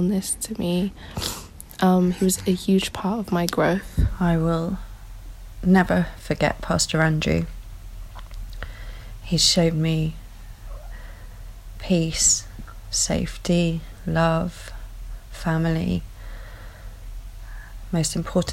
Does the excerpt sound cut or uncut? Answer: uncut